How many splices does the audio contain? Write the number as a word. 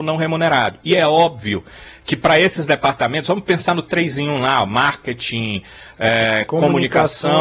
zero